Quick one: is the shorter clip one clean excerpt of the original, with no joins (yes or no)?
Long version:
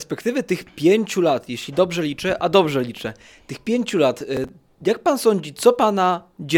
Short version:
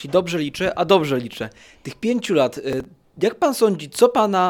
yes